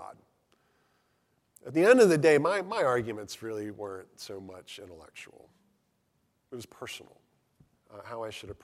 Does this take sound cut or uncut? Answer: cut